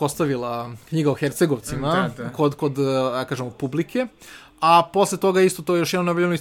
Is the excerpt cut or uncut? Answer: uncut